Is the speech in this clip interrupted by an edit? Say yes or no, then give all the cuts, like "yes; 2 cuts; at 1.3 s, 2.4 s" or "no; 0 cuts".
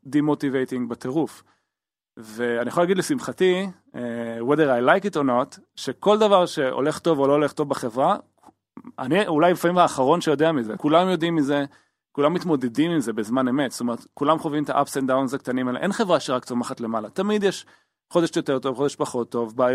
yes; 1 cut; at 10.8 s